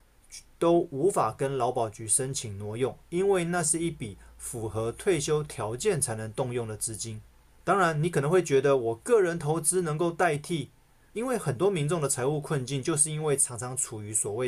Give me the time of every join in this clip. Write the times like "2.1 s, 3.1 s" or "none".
11.1 s